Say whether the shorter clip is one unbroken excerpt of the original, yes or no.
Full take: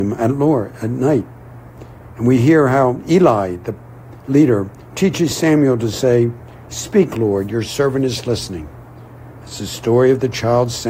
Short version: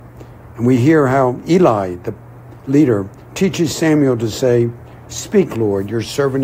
yes